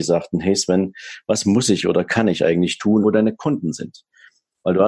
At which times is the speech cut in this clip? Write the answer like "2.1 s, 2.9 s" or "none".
3.0 s